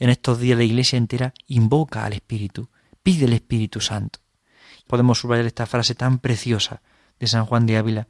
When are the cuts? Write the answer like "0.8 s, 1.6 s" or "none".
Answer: 4.9 s